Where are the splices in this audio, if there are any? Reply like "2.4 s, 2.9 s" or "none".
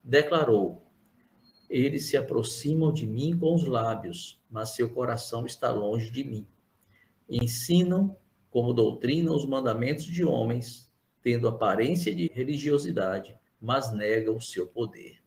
12.3 s, 13.5 s